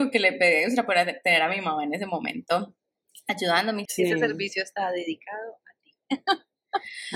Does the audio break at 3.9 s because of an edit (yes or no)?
yes